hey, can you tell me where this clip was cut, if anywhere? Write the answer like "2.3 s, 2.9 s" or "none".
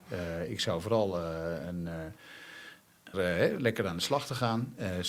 3.1 s